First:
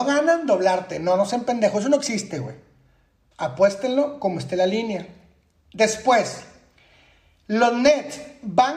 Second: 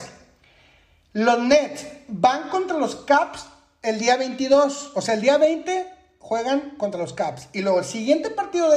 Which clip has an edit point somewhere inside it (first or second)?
first